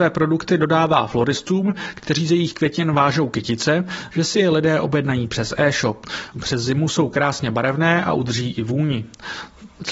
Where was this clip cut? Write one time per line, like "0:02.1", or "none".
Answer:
0:04.1
0:06.3